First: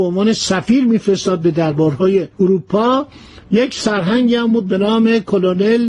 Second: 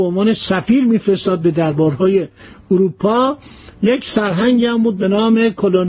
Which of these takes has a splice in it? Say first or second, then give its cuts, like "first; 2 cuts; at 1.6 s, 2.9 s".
first; 1 cut; at 2.3 s